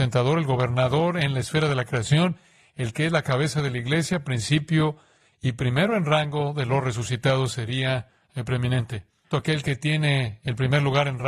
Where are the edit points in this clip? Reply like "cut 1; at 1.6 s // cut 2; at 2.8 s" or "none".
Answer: cut 1; at 9.3 s

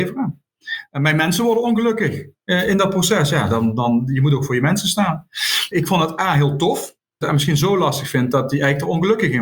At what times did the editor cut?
cut 1; at 5.7 s // cut 2; at 7.2 s

